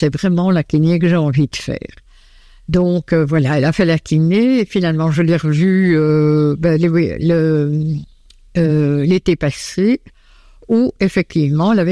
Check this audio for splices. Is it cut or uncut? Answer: uncut